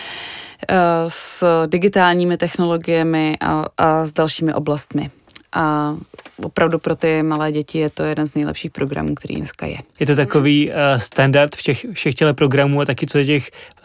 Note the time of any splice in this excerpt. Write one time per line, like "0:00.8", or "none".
0:10.0